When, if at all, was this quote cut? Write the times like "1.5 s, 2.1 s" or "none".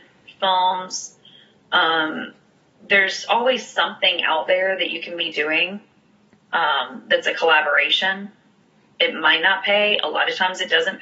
none